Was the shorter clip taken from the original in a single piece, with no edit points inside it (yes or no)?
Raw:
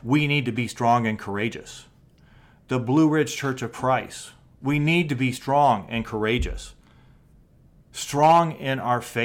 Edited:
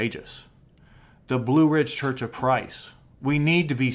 yes